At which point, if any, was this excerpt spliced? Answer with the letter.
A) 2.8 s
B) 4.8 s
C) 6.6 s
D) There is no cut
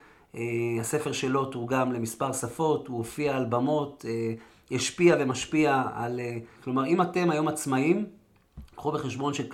C